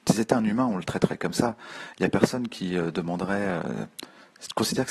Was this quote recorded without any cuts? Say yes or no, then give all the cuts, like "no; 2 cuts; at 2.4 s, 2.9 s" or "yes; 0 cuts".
yes; 0 cuts